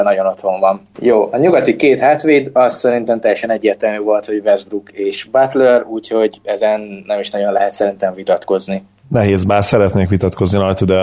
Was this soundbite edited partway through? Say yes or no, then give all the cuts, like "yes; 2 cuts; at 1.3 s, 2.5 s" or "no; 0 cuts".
yes; 2 cuts; at 0.9 s, 9.0 s